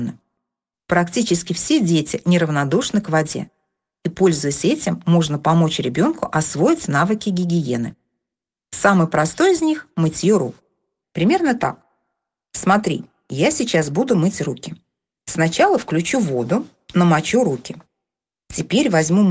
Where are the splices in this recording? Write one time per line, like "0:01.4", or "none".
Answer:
0:11.0